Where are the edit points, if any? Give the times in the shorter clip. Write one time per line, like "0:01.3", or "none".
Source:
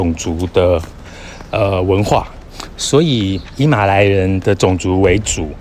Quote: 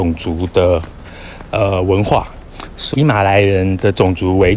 0:02.9